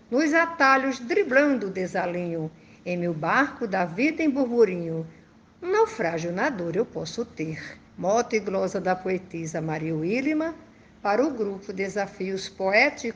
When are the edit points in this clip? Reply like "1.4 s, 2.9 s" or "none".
7.9 s